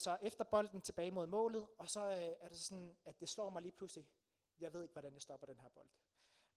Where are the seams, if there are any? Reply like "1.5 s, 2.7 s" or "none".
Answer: none